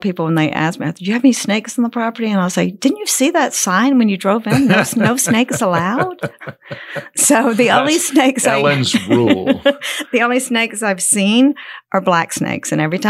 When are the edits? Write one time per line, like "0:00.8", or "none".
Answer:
none